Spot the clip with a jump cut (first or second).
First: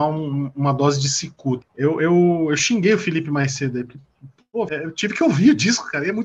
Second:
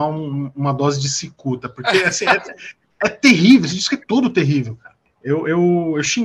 first